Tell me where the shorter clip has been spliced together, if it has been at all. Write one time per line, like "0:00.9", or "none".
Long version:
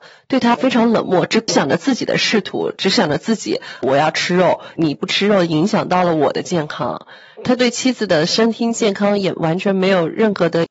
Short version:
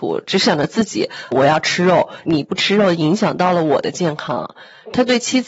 none